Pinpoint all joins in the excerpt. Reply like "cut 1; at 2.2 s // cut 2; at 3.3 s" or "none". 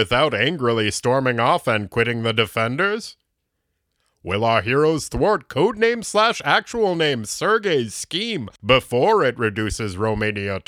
none